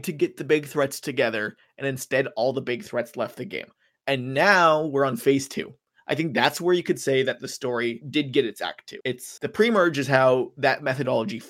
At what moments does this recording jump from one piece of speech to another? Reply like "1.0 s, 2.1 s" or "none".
none